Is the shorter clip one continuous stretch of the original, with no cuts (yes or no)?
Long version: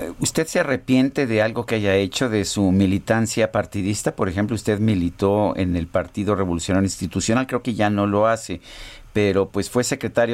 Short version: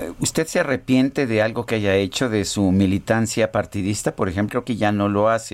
no